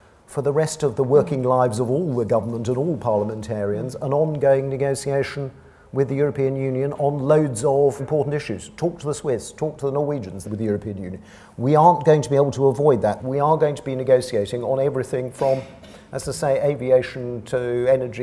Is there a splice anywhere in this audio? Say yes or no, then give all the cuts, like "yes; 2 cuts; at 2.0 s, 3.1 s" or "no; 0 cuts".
yes; 3 cuts; at 8.0 s, 10.4 s, 13.2 s